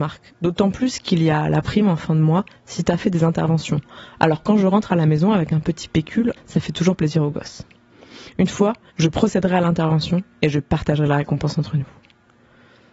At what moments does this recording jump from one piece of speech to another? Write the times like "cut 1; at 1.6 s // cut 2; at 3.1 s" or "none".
cut 1; at 6.4 s // cut 2; at 8.9 s